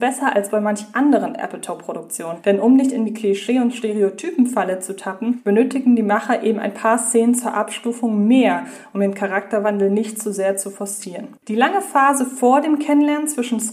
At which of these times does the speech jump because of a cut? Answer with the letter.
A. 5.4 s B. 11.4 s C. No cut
B